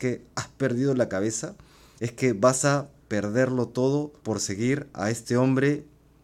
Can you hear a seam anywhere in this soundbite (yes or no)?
yes